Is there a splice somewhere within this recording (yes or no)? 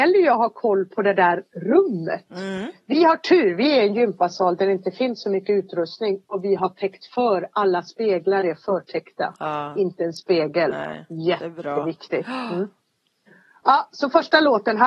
no